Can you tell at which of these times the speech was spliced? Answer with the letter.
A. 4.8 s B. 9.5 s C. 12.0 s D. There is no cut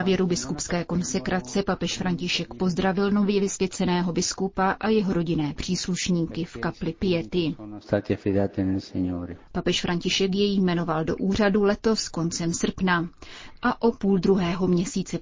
B